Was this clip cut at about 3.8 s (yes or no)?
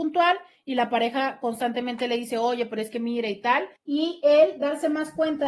yes